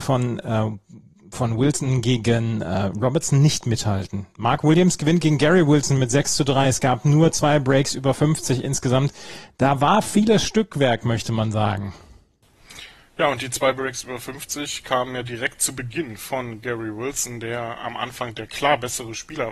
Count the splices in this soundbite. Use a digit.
0